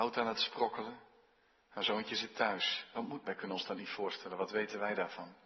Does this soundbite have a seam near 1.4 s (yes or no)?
no